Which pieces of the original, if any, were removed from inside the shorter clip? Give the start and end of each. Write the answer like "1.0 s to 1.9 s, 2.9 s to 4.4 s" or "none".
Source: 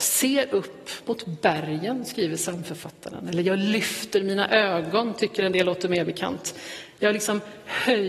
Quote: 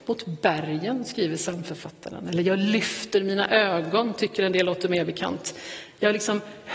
none